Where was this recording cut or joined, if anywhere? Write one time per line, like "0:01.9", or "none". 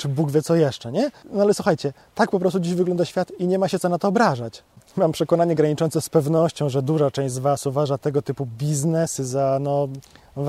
0:01.2